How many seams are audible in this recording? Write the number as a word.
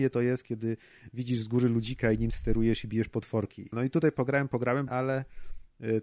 two